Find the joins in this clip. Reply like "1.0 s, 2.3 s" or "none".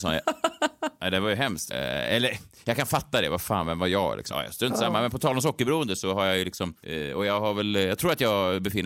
1.7 s, 4.3 s